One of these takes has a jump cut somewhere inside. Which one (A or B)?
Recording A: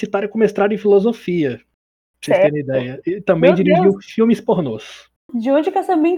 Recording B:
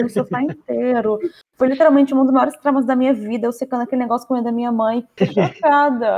B